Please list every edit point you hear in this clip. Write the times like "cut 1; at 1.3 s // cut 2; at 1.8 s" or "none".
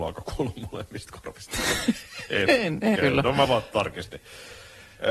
cut 1; at 3.0 s